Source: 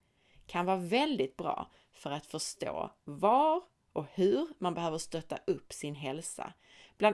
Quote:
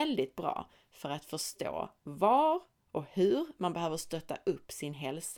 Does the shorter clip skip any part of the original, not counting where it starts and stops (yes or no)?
no